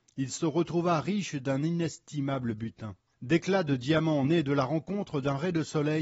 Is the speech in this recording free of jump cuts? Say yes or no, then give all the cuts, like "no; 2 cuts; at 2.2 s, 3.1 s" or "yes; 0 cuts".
yes; 0 cuts